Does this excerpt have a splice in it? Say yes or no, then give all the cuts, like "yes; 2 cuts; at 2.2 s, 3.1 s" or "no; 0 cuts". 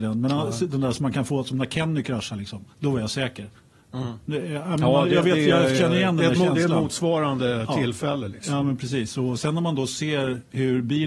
yes; 1 cut; at 2.7 s